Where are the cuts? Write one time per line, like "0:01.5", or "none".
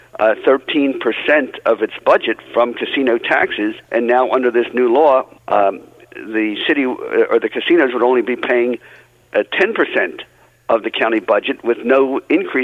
0:03.8
0:05.4